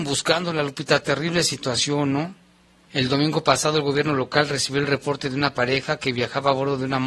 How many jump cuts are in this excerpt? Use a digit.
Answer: 1